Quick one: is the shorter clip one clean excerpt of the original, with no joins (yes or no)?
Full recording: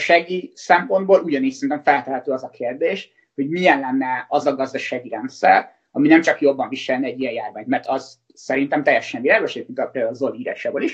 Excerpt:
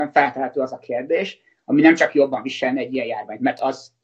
no